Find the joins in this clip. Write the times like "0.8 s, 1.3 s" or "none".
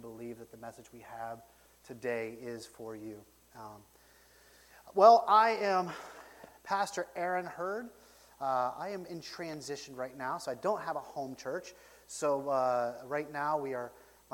none